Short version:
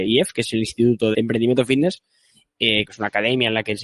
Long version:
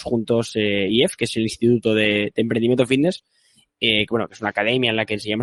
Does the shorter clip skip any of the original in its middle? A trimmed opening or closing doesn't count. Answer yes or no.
yes